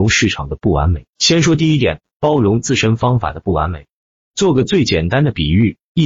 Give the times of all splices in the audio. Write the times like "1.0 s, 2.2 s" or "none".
none